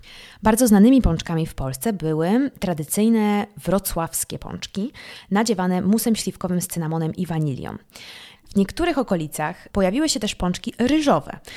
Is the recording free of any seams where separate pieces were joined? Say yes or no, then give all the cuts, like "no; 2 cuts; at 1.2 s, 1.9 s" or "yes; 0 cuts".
no; 2 cuts; at 8.4 s, 9.7 s